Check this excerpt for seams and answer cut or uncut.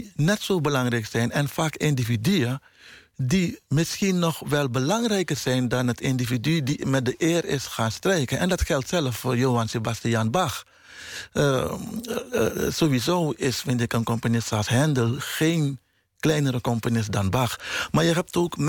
uncut